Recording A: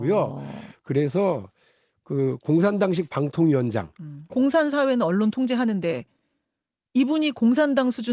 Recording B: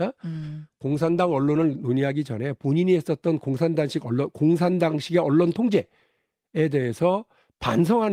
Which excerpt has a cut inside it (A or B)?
A